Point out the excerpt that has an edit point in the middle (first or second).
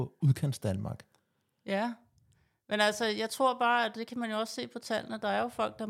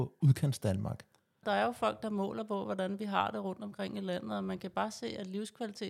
second